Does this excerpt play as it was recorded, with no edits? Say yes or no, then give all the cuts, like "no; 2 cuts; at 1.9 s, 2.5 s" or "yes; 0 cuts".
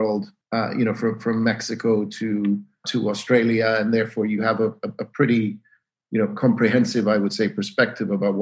yes; 0 cuts